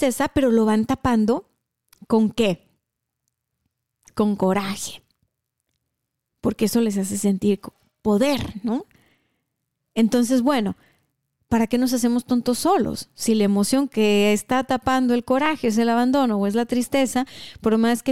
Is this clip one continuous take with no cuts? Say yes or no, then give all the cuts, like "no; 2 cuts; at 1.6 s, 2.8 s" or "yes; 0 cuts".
yes; 0 cuts